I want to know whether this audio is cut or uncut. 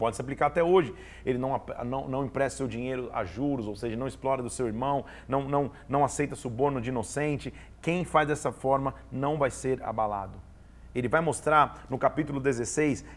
uncut